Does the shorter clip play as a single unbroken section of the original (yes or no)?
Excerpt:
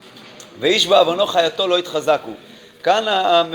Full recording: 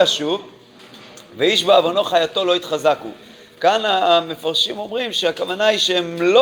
yes